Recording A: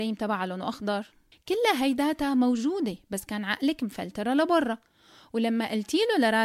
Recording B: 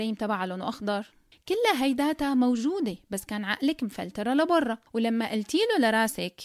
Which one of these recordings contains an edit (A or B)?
B